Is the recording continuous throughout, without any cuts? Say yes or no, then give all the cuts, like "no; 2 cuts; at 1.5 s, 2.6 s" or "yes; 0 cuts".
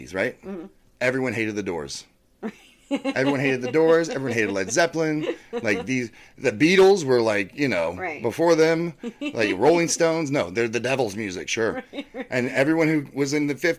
yes; 0 cuts